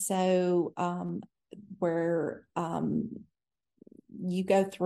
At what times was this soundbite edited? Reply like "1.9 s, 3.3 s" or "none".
1.8 s